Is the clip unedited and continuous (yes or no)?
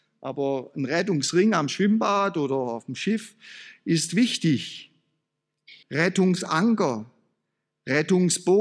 no